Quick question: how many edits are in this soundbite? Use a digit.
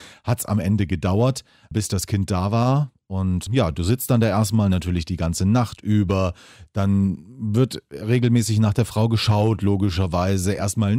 0